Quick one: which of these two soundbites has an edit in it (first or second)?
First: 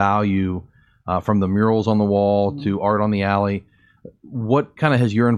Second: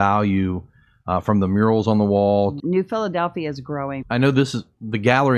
second